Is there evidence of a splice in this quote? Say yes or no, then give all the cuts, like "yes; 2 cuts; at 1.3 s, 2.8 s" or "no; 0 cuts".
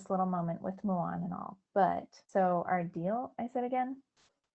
yes; 1 cut; at 2.2 s